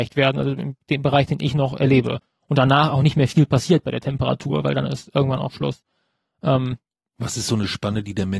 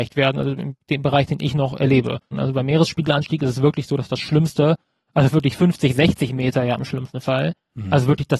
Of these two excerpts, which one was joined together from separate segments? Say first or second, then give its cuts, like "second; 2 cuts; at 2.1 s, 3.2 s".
second; 1 cut; at 2.3 s